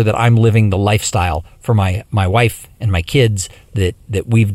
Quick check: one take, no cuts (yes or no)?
yes